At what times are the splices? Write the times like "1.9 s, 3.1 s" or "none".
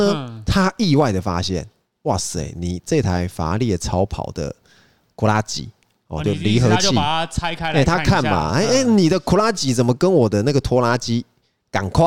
none